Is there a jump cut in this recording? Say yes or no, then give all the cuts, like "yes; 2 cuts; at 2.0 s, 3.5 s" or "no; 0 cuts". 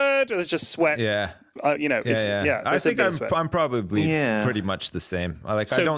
no; 0 cuts